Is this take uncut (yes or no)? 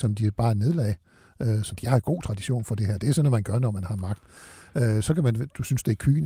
yes